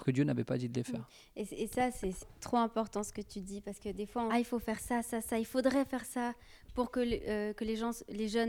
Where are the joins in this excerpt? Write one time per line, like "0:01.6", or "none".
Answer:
0:02.2
0:04.3